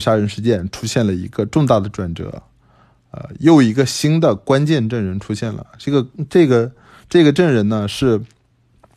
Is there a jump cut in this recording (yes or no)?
no